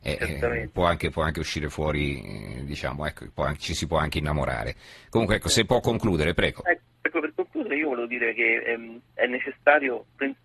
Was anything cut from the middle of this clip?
yes; 1 cut; at 9.0 s

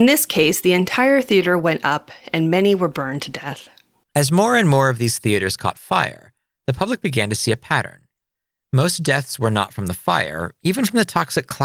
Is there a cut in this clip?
no; 0 cuts

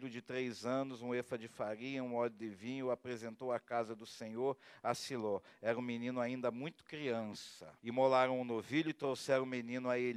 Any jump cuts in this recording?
yes; 1 cut; at 7.8 s

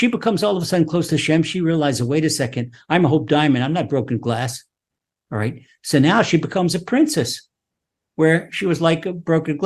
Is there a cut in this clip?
no; 0 cuts

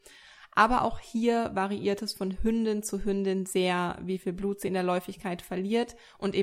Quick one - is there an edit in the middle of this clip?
no; 0 cuts

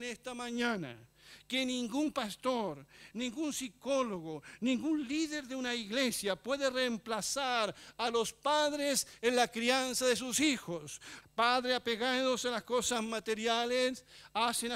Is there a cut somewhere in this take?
yes; 2 cuts; at 3.1 s, 11.2 s

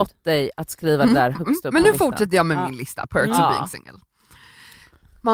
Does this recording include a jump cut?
no; 0 cuts

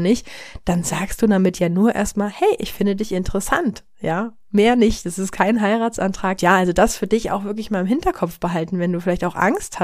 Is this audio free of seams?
no; 1 cut; at 6.4 s

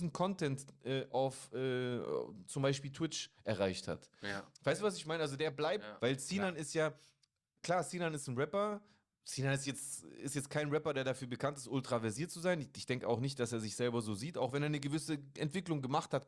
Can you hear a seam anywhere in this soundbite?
yes; 1 cut; at 6.0 s

